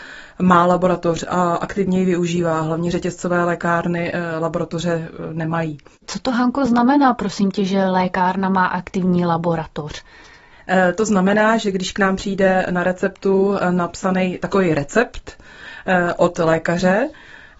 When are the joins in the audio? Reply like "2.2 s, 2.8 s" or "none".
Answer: none